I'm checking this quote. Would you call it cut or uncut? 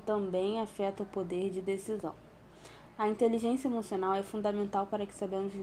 uncut